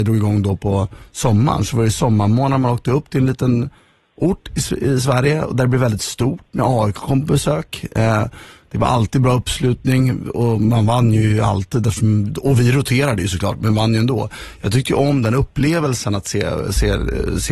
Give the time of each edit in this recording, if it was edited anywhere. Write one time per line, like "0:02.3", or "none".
none